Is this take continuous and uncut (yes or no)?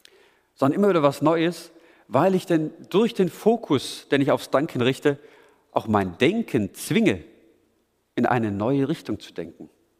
yes